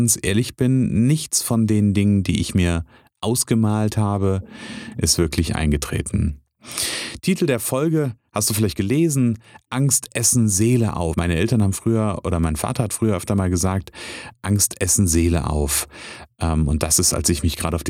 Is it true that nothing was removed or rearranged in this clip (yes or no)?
no